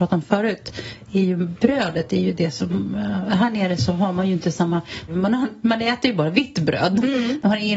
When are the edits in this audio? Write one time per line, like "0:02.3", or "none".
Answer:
0:05.1